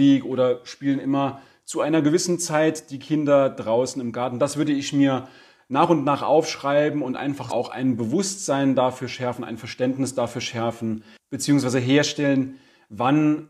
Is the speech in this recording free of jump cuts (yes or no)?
no